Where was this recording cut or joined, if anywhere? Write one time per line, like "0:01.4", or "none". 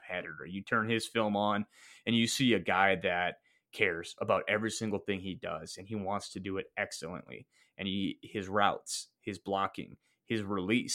none